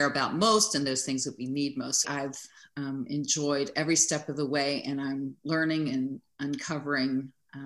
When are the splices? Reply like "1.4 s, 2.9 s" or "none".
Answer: 2.0 s